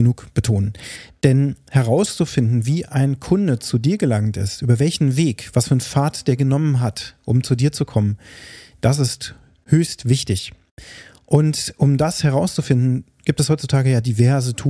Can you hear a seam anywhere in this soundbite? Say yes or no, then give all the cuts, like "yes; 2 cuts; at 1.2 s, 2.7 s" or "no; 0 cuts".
no; 0 cuts